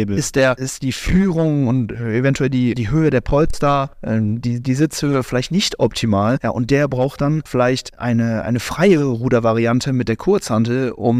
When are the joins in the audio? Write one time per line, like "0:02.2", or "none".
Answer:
none